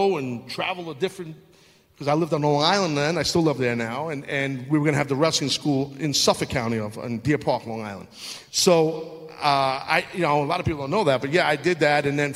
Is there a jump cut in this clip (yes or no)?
no